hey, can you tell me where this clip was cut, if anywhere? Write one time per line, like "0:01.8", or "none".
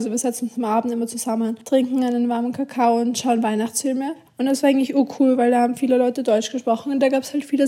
0:04.3